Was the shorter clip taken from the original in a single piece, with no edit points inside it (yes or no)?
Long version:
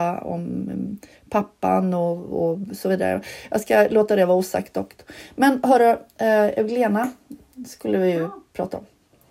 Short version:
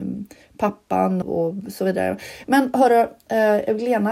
no